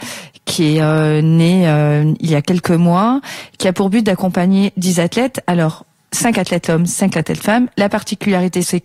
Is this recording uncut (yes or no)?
yes